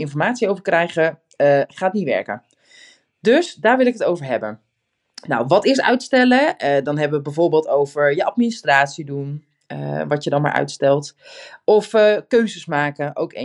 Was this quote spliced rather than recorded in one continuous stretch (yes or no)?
no